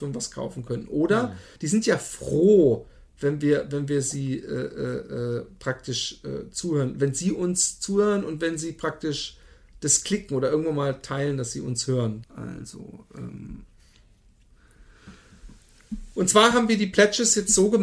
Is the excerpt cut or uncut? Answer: cut